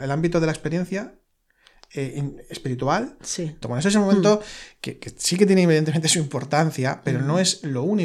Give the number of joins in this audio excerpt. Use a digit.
1